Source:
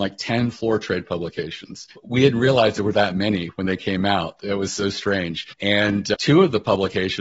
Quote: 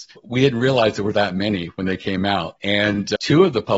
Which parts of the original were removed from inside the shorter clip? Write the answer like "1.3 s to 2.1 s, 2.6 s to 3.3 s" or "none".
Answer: 4.4 s to 5.5 s